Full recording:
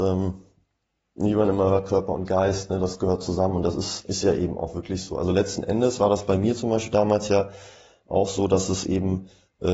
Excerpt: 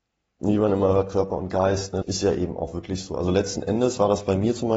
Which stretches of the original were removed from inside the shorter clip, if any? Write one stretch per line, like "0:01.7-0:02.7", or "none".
0:02.8-0:04.0